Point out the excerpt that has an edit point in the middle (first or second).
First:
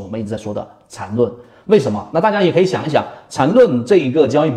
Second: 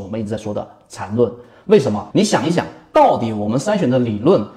second